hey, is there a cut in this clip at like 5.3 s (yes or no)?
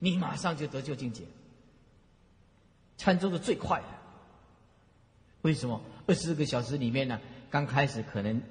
yes